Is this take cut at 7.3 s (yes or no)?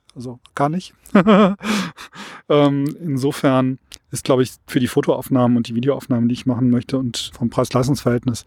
yes